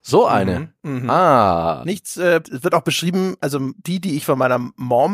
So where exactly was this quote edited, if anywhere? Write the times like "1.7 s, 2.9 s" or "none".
2.4 s